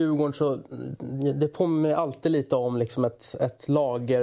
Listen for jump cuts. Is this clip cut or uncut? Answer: uncut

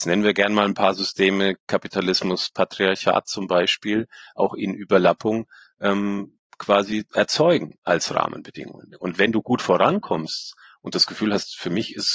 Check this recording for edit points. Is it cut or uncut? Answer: uncut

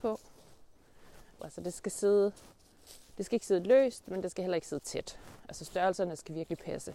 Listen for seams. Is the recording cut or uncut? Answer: cut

